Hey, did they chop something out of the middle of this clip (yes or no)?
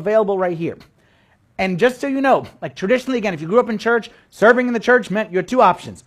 no